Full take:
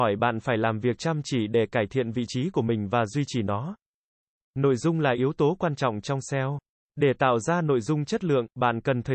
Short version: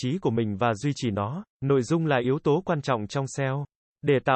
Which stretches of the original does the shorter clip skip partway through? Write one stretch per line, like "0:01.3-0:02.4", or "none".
0:03.8-0:04.4